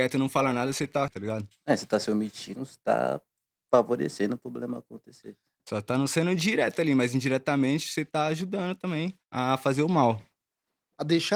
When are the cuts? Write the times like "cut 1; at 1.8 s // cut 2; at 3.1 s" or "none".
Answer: cut 1; at 1.1 s // cut 2; at 5.6 s // cut 3; at 9.2 s

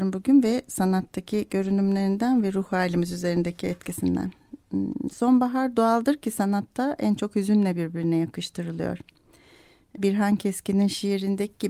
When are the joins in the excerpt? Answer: cut 1; at 10.0 s

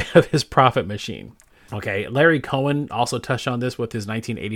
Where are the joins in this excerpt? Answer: cut 1; at 1.7 s

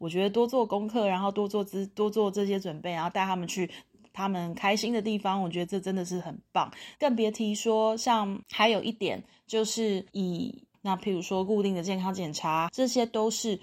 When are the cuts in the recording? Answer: cut 1; at 10.7 s // cut 2; at 12.7 s

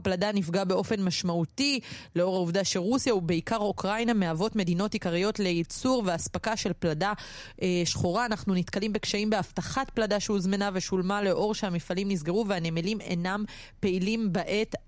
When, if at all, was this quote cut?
none

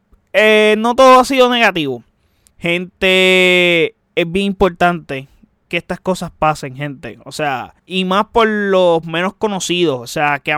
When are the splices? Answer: cut 1; at 2.5 s // cut 2; at 7.8 s

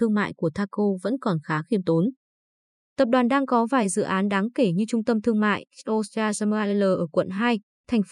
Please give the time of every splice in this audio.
none

